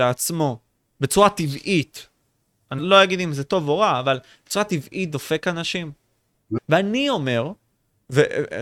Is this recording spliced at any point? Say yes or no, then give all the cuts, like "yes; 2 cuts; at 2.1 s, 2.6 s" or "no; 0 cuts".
yes; 2 cuts; at 2.8 s, 6.6 s